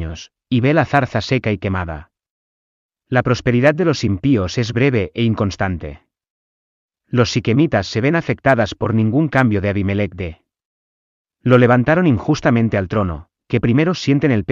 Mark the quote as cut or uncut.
uncut